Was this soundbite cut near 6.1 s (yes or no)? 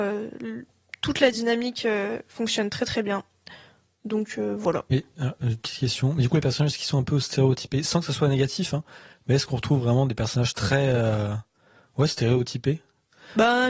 no